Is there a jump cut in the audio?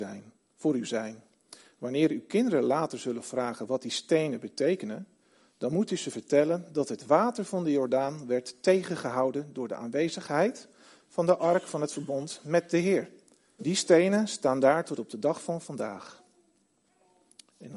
yes; 1 cut; at 13.6 s

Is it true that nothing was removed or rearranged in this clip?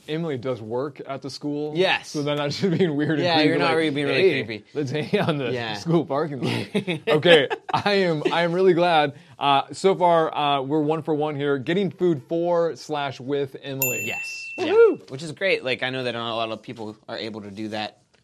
yes; 0 cuts

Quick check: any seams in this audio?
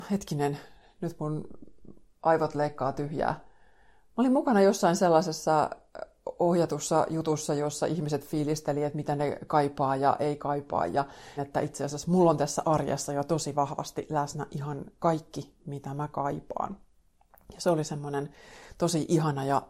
yes; 1 cut; at 11.4 s

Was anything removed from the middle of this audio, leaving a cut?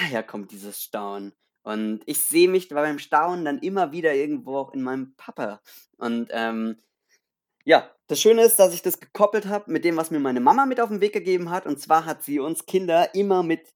no; 0 cuts

